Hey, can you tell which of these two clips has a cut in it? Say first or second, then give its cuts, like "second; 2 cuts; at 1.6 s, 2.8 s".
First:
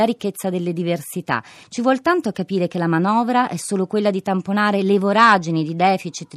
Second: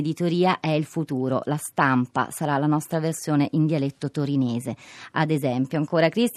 first; 1 cut; at 1.6 s